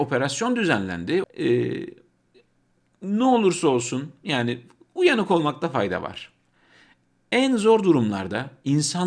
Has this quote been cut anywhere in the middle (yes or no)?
yes